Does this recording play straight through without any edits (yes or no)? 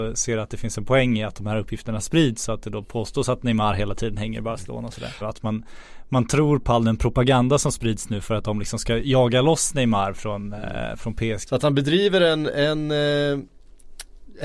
no